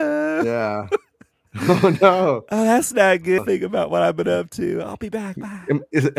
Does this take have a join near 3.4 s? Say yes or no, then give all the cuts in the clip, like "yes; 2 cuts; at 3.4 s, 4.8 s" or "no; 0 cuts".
yes; 1 cut; at 3.4 s